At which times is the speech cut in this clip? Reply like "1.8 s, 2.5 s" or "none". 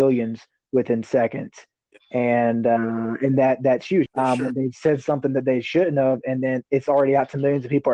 4.1 s